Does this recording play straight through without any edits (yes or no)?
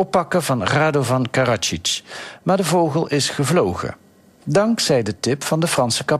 yes